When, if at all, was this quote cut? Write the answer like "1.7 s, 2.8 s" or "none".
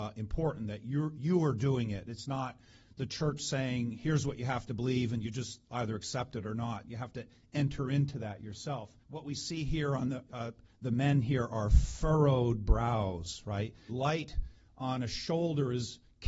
9.0 s, 10.3 s, 13.9 s